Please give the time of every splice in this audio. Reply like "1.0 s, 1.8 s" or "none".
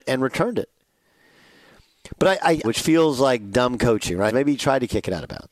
2.6 s, 4.3 s